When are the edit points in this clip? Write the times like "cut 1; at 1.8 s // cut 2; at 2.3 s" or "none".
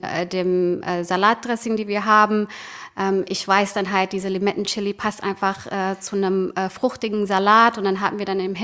none